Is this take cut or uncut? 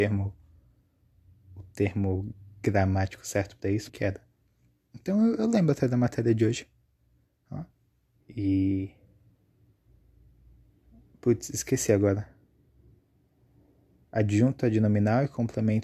cut